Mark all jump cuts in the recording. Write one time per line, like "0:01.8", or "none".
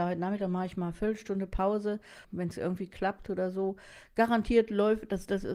0:02.2